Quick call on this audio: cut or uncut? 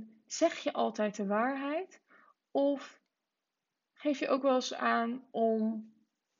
uncut